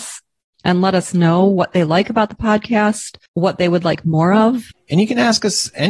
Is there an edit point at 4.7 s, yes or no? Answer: yes